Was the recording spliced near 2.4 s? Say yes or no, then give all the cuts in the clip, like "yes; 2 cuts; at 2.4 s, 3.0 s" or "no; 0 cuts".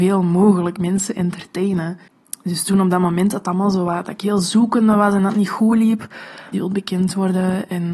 no; 1 cut; at 6.5 s